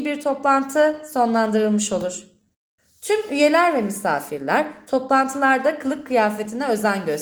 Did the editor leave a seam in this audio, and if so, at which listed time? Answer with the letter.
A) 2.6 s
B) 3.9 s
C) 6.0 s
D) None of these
D